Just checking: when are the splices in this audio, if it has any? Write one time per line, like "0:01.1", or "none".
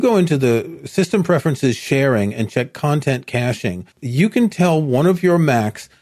0:03.9

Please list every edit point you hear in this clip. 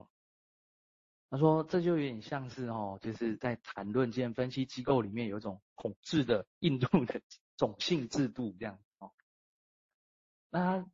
none

